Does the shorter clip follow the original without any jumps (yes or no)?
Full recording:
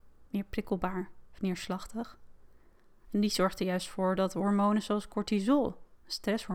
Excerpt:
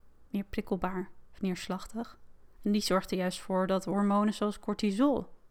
no